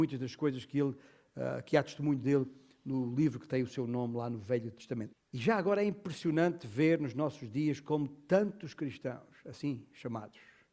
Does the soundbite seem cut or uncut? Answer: cut